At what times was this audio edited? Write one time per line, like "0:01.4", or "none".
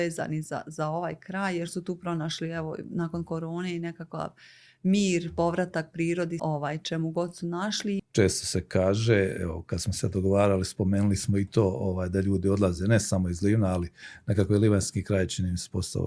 0:06.4
0:08.0